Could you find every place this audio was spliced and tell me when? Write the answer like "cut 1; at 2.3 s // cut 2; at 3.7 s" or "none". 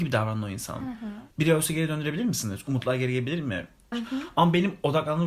cut 1; at 1.3 s // cut 2; at 3.9 s